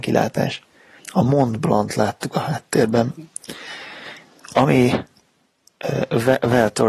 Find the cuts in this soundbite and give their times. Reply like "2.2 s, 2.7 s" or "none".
1.0 s